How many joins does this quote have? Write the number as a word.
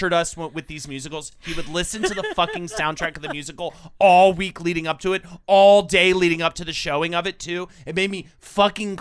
zero